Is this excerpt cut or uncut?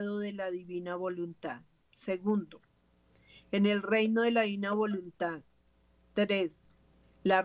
uncut